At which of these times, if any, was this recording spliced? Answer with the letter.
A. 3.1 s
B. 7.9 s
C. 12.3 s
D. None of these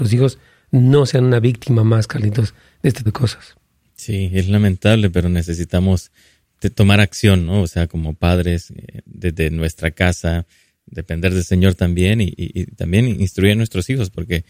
A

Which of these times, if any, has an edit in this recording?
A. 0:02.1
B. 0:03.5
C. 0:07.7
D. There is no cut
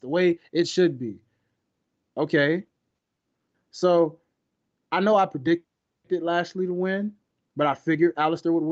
B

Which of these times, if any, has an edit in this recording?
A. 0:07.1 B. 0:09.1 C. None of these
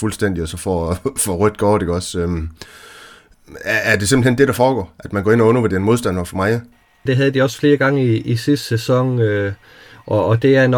A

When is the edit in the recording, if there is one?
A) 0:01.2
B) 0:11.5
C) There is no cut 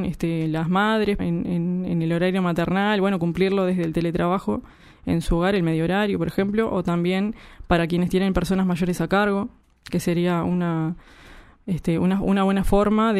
A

